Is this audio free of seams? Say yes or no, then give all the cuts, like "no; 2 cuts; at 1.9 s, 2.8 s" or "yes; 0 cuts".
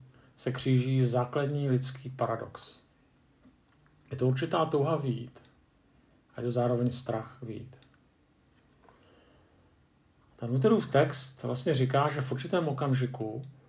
yes; 0 cuts